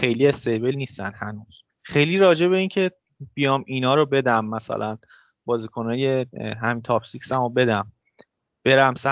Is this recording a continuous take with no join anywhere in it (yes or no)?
no